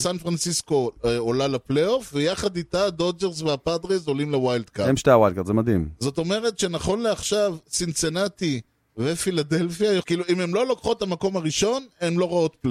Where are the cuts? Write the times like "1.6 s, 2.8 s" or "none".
none